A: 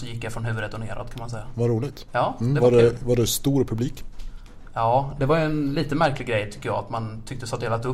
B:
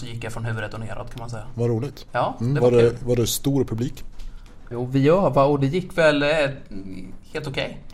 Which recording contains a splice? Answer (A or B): B